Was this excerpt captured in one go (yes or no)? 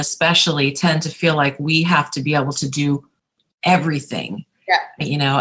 yes